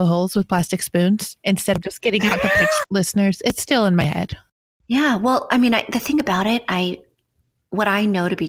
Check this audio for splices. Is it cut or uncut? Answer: cut